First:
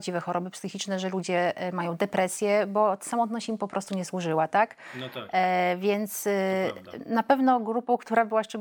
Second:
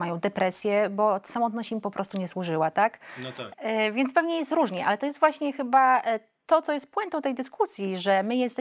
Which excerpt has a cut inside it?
second; 1 cut; at 3.5 s

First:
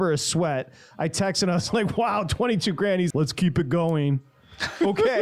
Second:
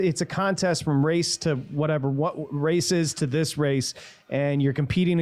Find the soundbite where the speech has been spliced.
first; 1 cut; at 3.1 s

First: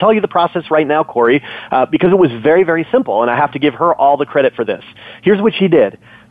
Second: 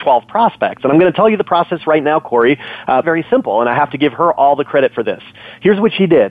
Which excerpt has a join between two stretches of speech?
second; 1 cut; at 3.0 s

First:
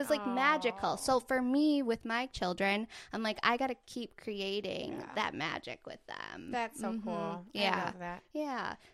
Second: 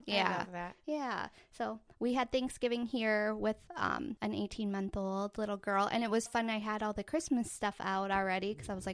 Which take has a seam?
second; 2 cuts; at 4.2 s, 6.3 s

